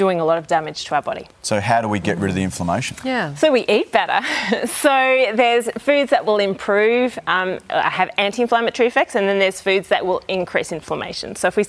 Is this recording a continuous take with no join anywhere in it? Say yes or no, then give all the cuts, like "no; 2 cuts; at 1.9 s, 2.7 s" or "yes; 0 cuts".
yes; 0 cuts